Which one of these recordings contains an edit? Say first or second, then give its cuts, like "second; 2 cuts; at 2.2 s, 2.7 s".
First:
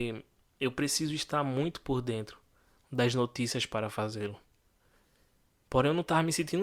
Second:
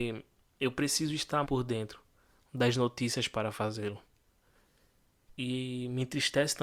second; 2 cuts; at 1.4 s, 5.3 s